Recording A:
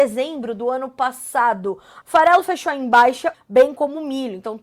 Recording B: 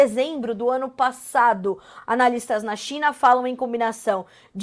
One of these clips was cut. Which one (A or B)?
A